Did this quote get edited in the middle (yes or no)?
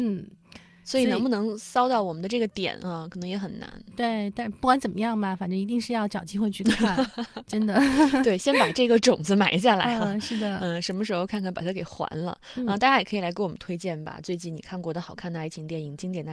no